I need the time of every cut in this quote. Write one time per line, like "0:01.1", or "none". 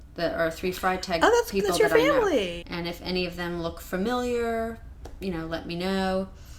0:02.6